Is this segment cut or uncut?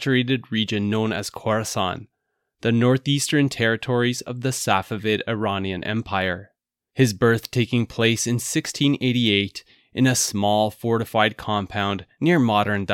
cut